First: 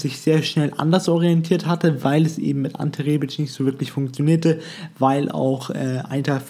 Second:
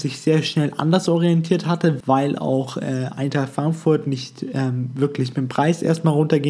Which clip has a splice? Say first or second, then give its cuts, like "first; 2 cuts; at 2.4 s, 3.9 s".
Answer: second; 1 cut; at 2.0 s